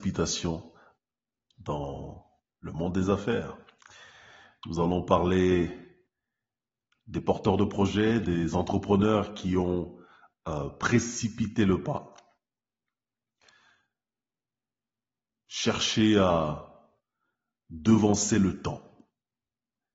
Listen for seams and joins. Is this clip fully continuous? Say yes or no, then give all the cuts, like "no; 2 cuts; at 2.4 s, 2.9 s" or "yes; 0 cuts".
yes; 0 cuts